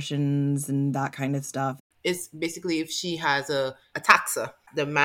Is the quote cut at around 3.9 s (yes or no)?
yes